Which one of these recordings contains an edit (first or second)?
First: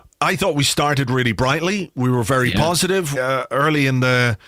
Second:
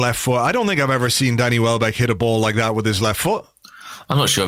first